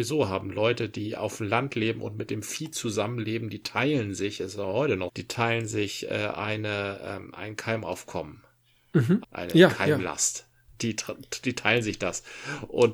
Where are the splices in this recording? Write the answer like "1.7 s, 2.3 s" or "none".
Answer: 5.1 s, 9.2 s